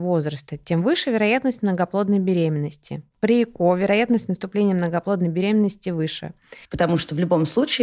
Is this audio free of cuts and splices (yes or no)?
no